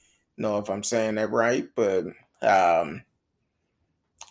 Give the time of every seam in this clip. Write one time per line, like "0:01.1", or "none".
none